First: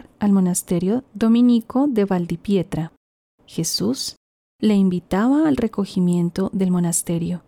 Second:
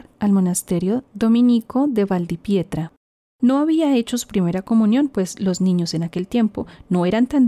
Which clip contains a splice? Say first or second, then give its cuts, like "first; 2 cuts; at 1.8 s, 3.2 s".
first; 1 cut; at 3.3 s